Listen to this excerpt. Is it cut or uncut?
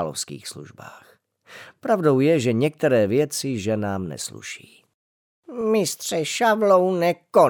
uncut